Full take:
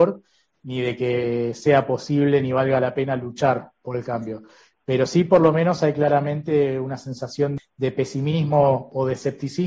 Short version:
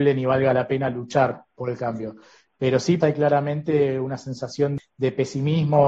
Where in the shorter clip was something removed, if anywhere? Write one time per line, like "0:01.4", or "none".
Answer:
0:03.0